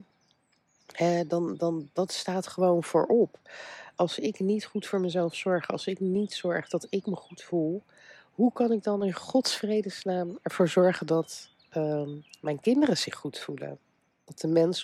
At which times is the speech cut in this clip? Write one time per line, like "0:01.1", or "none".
none